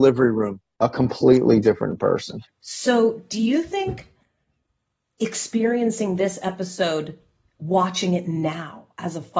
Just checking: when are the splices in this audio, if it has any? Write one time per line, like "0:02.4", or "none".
none